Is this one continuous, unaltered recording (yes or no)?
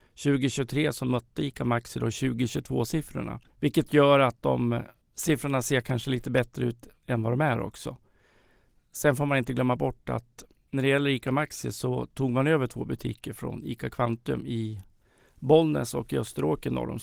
yes